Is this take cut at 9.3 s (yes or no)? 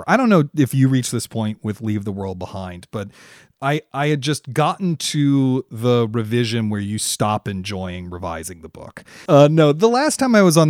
yes